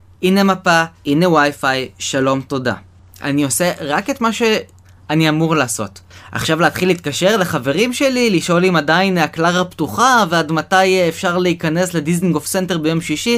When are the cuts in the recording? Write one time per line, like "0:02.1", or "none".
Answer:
0:01.0